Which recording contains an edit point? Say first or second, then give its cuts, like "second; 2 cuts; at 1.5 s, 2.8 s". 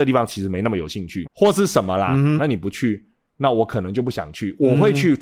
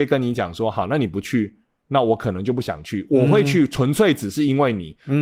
first; 2 cuts; at 1.2 s, 2.4 s